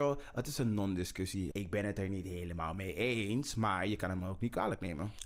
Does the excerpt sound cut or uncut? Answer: cut